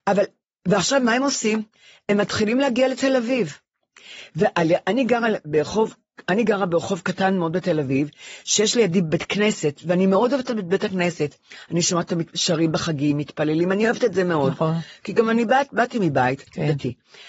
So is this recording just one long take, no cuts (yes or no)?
yes